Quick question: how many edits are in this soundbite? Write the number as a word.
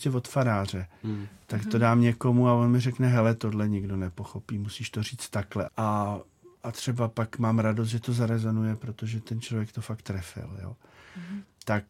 one